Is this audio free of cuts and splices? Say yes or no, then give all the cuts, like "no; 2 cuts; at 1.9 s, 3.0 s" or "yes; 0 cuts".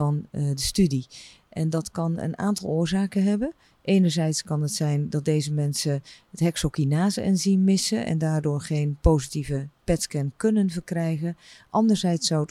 yes; 0 cuts